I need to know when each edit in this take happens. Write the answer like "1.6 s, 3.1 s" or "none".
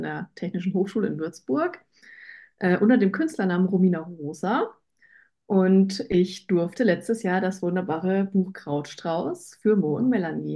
none